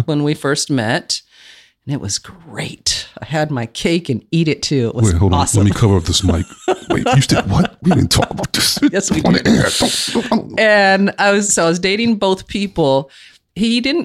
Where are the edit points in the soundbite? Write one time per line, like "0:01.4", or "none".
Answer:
none